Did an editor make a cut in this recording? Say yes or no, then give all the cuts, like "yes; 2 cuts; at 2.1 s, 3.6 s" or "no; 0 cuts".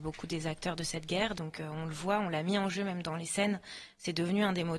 yes; 1 cut; at 1.4 s